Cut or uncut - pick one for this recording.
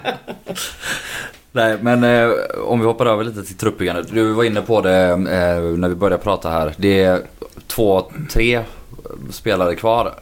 uncut